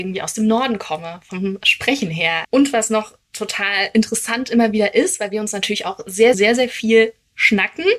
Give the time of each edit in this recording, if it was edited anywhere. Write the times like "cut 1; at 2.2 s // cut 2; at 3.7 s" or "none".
cut 1; at 2.4 s // cut 2; at 6.3 s